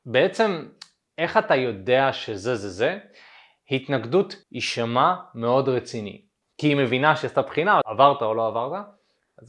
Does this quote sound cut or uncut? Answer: cut